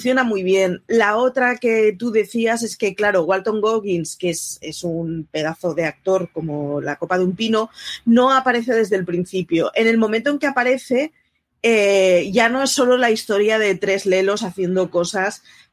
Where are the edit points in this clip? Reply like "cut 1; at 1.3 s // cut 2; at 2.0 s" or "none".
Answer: none